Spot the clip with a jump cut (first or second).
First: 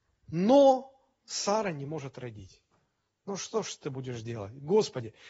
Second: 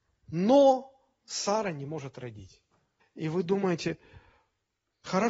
second